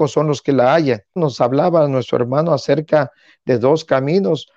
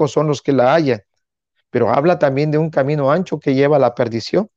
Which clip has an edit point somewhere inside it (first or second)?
first